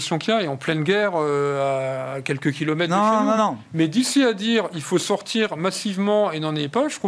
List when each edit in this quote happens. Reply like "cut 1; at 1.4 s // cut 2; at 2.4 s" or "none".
none